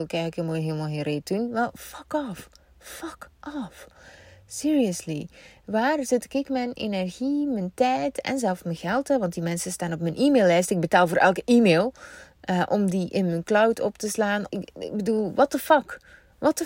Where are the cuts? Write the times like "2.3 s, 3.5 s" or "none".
14.5 s